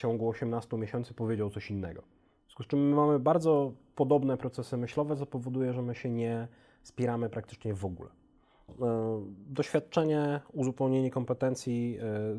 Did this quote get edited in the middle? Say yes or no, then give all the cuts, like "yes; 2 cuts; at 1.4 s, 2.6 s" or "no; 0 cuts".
yes; 1 cut; at 8.7 s